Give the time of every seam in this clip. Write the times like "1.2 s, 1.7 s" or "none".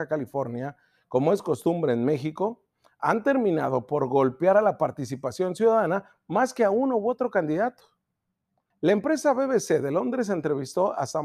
8.7 s

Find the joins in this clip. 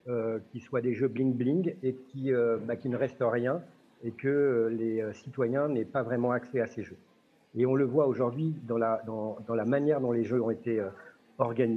none

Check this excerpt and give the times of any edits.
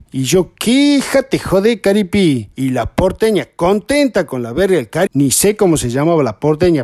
2.5 s, 5.1 s

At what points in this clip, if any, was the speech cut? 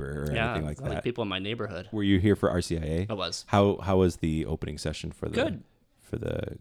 none

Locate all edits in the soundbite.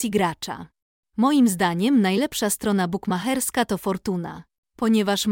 1.0 s

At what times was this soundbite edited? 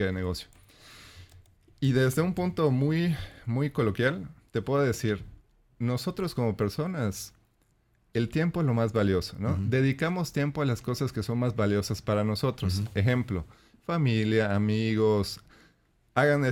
none

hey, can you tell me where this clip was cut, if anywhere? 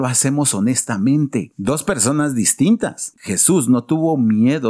1.5 s, 3.1 s

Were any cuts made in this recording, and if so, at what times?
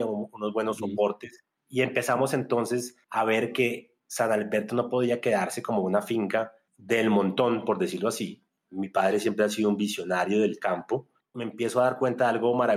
8.6 s, 11.2 s

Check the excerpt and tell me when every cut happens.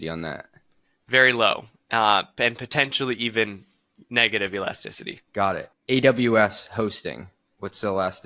5.3 s

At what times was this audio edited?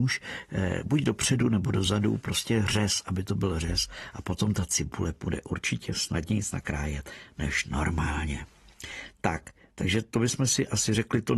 none

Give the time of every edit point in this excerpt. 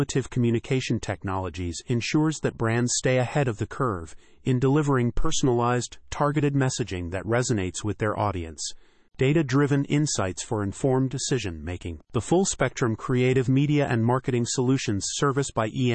9.1 s

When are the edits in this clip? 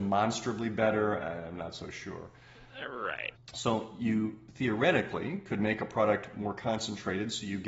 3.4 s

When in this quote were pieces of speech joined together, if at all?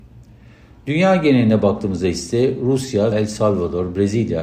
3.1 s

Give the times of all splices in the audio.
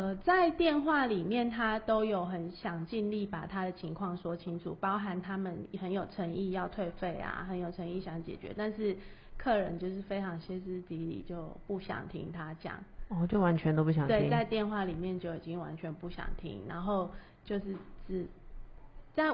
none

